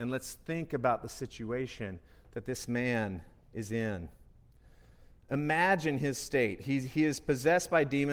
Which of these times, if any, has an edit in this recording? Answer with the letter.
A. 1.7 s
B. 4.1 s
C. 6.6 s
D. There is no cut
D